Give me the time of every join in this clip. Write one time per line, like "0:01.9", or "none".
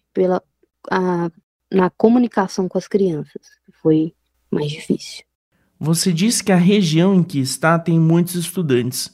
none